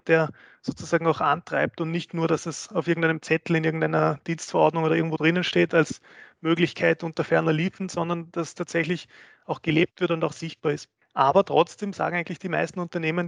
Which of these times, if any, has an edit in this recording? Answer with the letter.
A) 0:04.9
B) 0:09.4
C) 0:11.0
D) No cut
C